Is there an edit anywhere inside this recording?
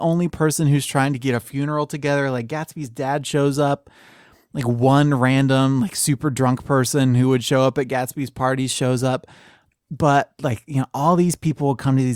no; 0 cuts

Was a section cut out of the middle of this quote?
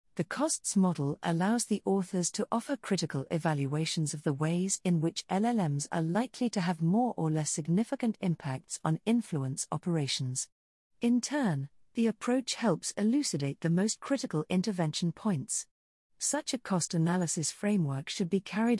no; 0 cuts

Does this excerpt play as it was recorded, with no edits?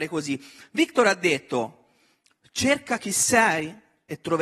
yes; 0 cuts

